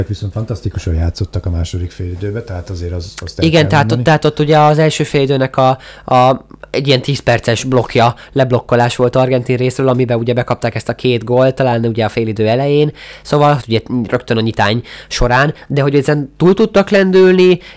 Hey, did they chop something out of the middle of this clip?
yes; 1 cut; at 13.6 s

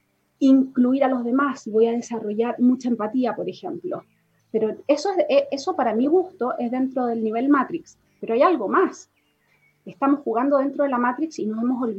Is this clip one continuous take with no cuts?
no; 1 cut; at 4.4 s

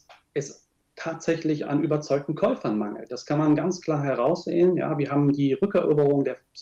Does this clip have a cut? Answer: no; 0 cuts

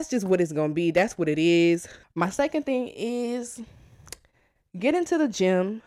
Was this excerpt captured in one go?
no; 1 cut; at 2.0 s

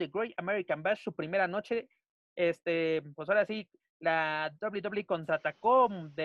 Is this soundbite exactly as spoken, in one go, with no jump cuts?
yes; 0 cuts

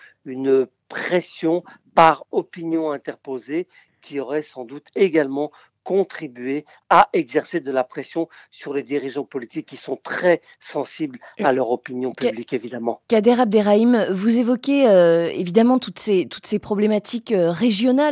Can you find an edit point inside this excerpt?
no; 0 cuts

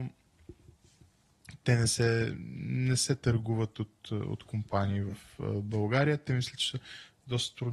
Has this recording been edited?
no; 0 cuts

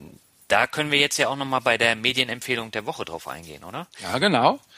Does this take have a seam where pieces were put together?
no; 0 cuts

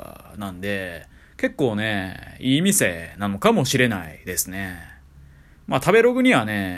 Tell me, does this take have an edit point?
no; 0 cuts

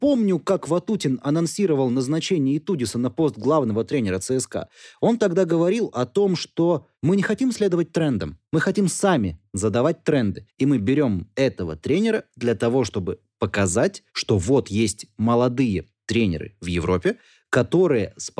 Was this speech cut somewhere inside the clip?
no; 0 cuts

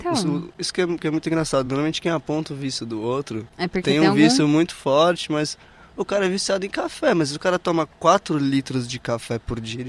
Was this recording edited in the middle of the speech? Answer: no; 0 cuts

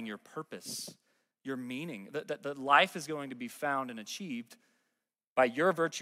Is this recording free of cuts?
yes; 0 cuts

